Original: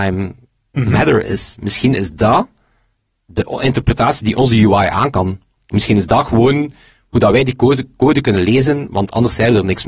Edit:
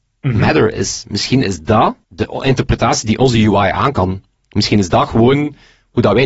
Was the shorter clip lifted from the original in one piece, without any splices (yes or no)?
no